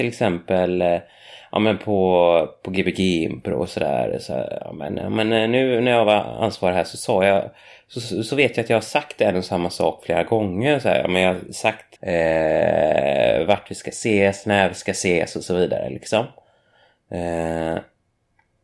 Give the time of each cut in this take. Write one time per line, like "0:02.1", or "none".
0:12.0